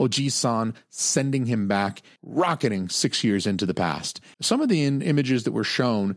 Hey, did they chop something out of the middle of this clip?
yes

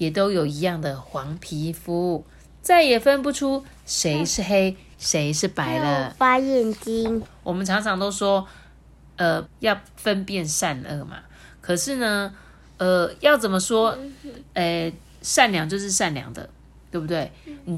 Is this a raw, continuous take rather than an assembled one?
no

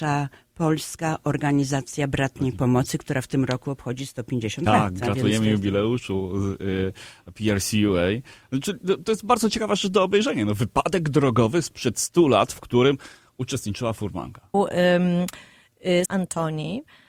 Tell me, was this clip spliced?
yes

